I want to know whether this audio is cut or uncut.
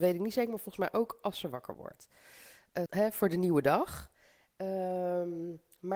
cut